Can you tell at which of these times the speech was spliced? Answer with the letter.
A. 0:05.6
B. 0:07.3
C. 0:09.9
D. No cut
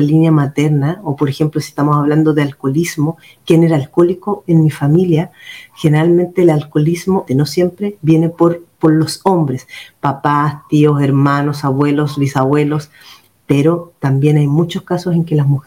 B